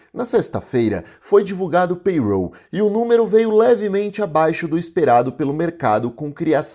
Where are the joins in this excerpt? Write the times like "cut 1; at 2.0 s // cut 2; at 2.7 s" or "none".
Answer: none